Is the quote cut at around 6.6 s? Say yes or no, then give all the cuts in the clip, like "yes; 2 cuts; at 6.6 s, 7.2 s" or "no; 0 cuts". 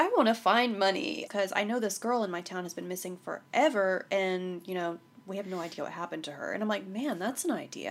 no; 1 cut; at 1.3 s